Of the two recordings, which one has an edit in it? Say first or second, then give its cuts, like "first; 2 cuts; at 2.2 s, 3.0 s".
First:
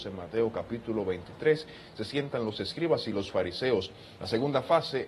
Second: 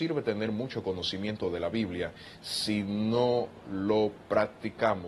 first; 1 cut; at 4.2 s